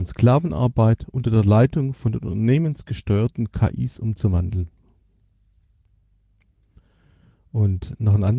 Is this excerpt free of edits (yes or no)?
yes